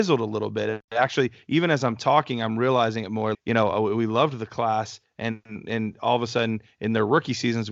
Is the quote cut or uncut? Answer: cut